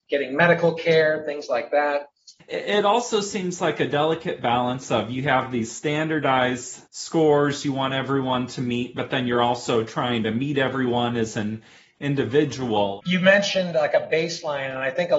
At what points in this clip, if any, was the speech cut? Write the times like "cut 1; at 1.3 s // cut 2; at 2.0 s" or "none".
cut 1; at 2.4 s // cut 2; at 6.9 s // cut 3; at 13.0 s